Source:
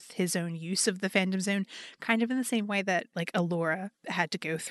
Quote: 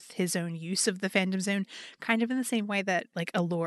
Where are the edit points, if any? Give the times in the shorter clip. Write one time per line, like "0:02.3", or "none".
none

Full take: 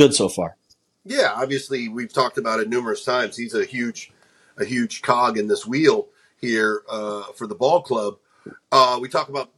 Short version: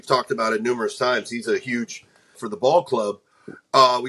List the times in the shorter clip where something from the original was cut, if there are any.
0:02.3

